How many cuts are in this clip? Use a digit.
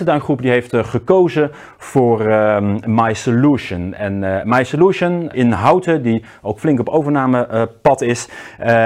1